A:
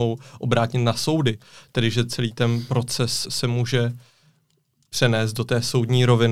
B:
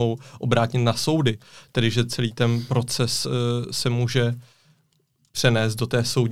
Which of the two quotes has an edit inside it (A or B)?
A